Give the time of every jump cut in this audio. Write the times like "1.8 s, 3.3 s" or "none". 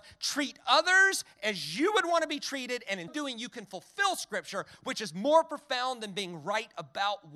3.1 s

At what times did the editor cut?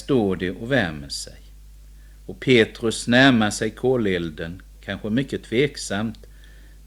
none

